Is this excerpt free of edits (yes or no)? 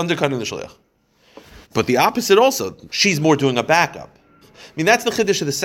no